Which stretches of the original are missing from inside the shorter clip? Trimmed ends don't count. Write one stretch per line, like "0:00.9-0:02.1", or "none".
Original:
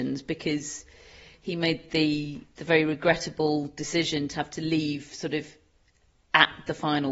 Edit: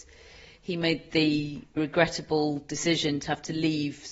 0:02.6-0:02.9